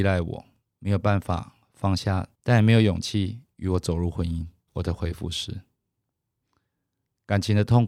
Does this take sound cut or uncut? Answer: cut